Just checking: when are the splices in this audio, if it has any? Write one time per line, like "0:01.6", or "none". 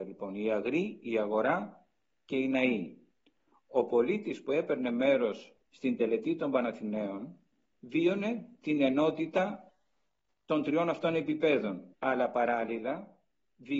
0:05.6
0:07.6
0:11.9